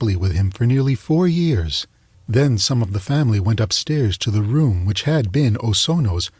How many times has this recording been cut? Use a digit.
1